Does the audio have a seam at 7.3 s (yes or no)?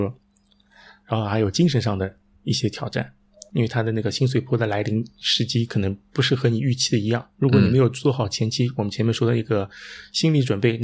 no